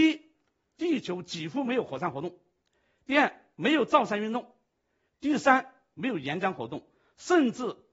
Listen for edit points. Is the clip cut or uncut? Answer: uncut